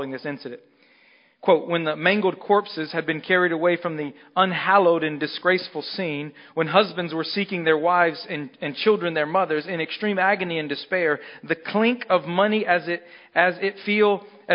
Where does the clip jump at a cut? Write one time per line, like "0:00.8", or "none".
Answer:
none